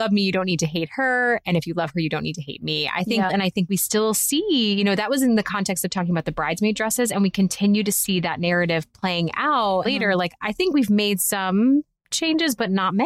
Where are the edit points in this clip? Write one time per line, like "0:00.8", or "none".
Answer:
0:03.3
0:09.8